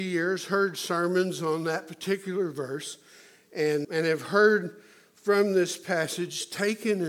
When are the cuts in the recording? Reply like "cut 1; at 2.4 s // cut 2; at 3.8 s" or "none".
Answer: cut 1; at 3.8 s